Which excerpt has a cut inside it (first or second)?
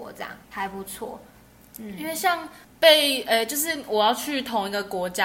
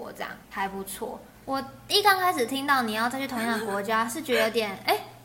second